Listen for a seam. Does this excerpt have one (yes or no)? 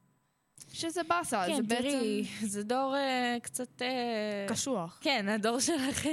no